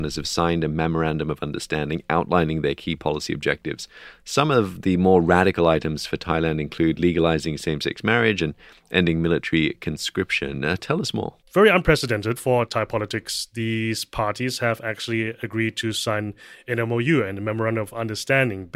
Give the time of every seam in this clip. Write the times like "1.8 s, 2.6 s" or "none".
11.4 s